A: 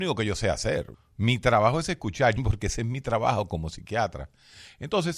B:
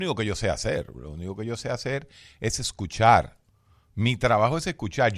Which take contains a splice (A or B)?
A